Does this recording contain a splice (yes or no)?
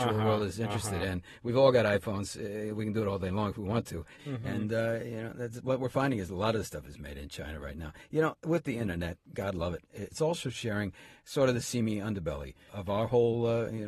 yes